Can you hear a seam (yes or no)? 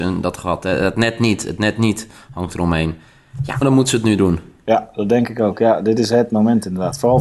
yes